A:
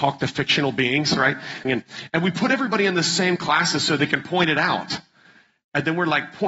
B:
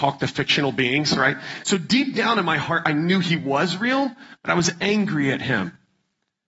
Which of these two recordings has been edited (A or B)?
A